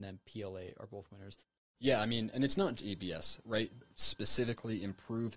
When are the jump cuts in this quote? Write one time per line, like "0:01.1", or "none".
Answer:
0:02.8
0:03.8